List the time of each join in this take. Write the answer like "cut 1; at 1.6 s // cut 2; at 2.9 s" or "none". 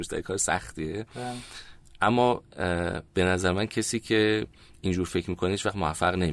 cut 1; at 3.1 s